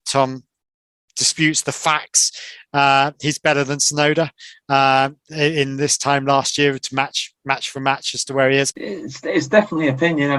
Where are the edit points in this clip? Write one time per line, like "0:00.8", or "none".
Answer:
0:08.7